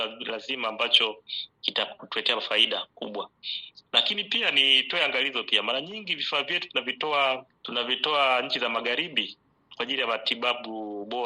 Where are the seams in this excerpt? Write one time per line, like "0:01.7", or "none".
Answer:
none